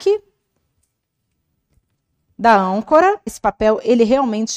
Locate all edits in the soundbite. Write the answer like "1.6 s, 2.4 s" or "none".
3.3 s